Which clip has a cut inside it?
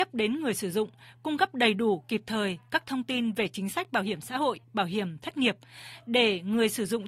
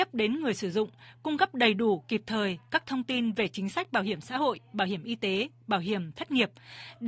first; 1 cut; at 4.6 s

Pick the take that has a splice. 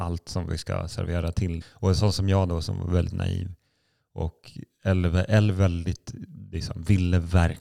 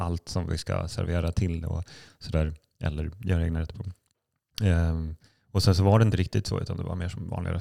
first; 1 cut; at 1.6 s

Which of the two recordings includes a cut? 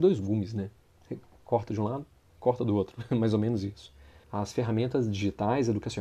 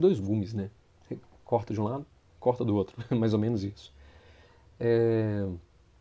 first; 1 cut; at 4.2 s

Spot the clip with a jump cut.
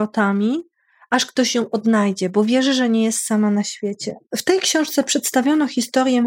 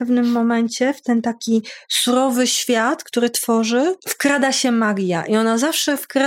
first; 1 cut; at 4.3 s

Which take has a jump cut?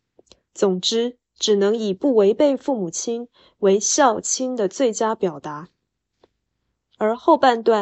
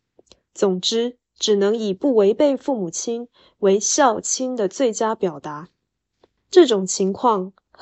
second; 1 cut; at 6.4 s

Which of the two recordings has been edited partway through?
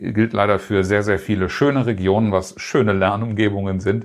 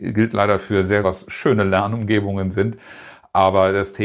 second; 1 cut; at 1.0 s

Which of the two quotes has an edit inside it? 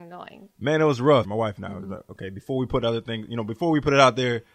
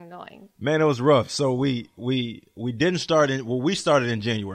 first; 1 cut; at 1.2 s

